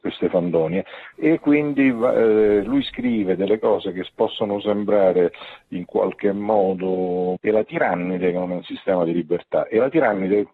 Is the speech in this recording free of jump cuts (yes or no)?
no